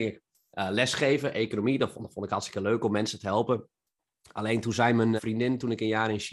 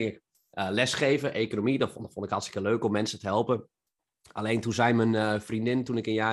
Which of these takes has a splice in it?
first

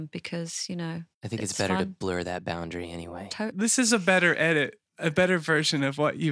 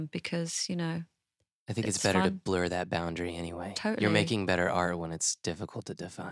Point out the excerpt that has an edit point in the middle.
first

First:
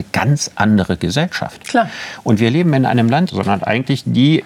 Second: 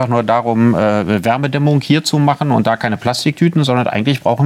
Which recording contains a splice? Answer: first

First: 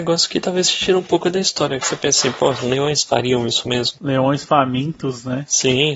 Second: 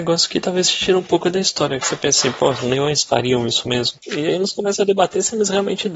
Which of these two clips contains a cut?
second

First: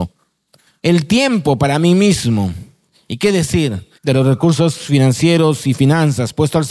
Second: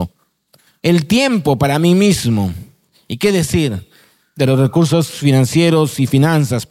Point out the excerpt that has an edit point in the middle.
first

